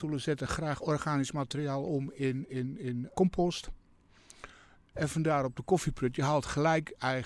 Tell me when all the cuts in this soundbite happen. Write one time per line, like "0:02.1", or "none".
0:03.1
0:04.9